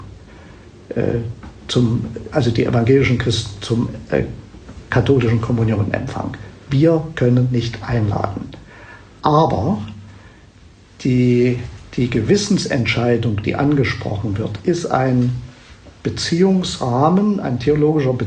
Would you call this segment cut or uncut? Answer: uncut